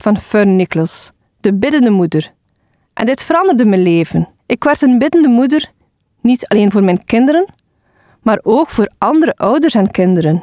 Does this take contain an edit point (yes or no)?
yes